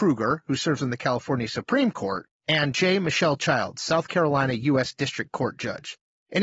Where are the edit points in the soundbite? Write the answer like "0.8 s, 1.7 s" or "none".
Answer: none